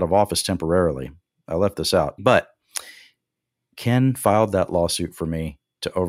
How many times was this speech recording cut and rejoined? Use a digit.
1